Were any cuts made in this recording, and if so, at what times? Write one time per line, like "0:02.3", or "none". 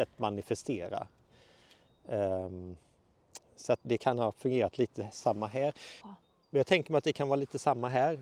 0:03.8
0:06.0